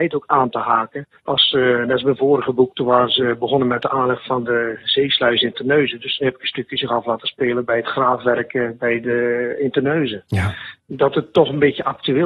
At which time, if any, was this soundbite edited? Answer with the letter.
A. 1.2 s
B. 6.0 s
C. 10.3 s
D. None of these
A